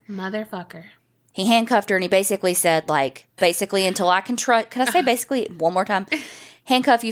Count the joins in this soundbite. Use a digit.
1